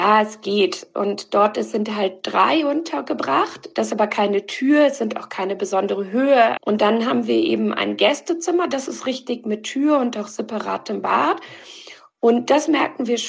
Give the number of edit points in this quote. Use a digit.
1